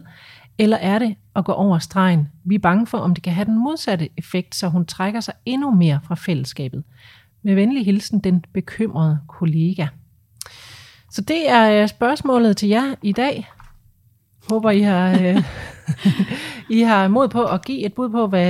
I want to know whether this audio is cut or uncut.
uncut